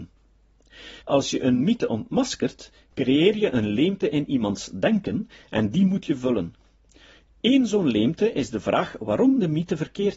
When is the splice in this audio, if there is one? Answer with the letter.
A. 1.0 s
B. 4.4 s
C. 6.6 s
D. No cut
A